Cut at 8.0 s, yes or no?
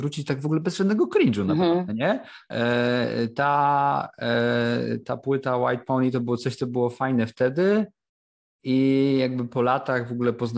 no